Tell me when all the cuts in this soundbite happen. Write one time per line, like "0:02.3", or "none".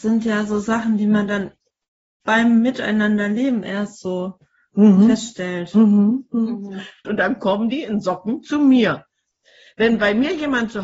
0:07.0